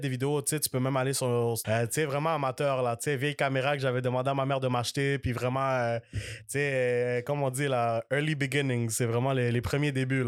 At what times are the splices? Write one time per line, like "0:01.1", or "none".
0:01.6